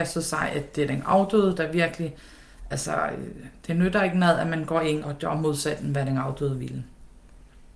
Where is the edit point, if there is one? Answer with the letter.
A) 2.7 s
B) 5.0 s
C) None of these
B